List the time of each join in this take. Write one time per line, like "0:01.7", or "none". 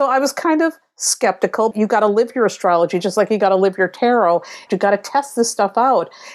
0:01.7
0:04.7